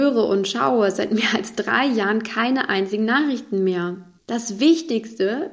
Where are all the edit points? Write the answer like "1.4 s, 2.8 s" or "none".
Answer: 4.2 s